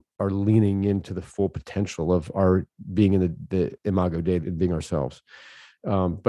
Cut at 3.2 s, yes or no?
no